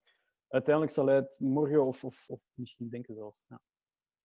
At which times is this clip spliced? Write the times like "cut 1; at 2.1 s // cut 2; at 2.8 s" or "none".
cut 1; at 2.3 s